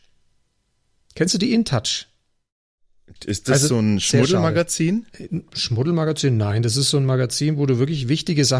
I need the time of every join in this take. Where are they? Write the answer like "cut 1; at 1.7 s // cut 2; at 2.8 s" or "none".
cut 1; at 3.2 s